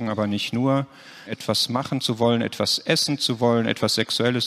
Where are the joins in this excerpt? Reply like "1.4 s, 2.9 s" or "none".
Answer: 1.3 s